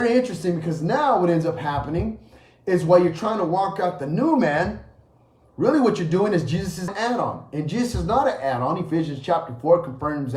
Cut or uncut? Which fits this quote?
cut